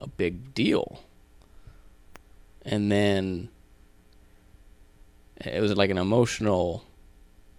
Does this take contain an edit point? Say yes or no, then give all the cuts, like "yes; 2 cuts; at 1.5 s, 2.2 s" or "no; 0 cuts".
no; 0 cuts